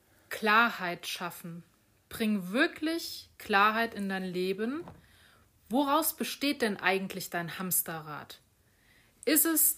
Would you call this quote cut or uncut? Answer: uncut